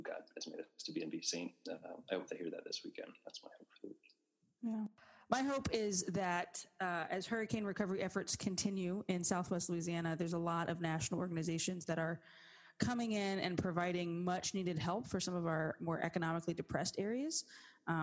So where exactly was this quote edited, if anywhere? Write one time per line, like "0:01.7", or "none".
none